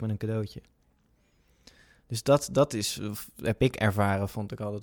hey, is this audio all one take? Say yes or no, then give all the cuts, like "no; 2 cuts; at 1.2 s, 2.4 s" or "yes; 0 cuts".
yes; 0 cuts